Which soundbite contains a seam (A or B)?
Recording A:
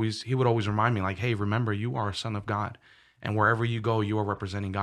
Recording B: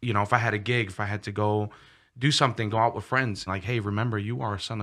B